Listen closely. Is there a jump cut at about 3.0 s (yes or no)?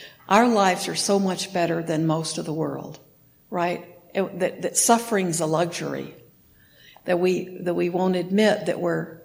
no